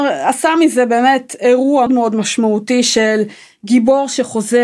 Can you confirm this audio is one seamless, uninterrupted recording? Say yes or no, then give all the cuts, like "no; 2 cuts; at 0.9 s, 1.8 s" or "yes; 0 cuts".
no; 1 cut; at 1.9 s